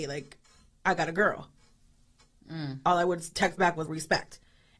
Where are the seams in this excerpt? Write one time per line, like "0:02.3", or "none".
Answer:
0:02.4
0:03.9